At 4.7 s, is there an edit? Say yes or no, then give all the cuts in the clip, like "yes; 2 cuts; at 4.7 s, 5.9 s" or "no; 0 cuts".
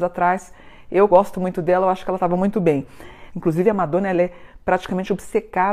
no; 2 cuts; at 1.1 s, 3.3 s